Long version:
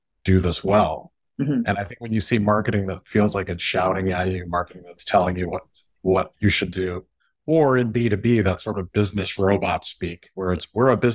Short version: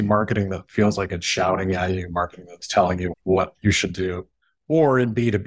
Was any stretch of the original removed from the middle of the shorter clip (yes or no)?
yes